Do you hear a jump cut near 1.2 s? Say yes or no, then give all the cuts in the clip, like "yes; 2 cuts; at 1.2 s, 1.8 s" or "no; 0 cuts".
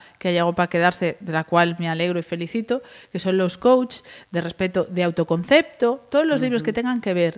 no; 0 cuts